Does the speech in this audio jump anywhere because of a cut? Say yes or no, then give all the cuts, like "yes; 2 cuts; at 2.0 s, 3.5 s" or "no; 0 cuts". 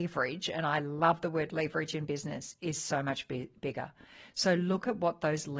no; 0 cuts